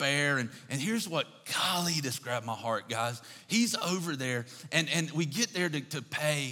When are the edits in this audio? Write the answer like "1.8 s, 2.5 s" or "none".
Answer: none

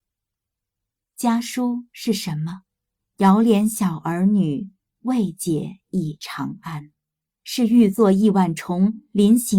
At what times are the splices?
3.0 s, 7.3 s

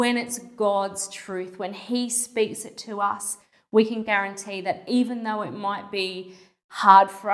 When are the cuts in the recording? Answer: none

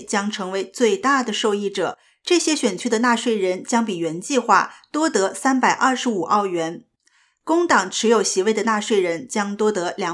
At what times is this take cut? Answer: none

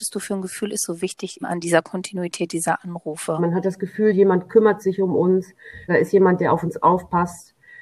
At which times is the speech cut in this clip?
1.4 s, 3.4 s, 5.9 s

